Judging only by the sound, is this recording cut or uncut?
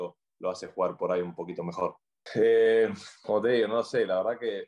cut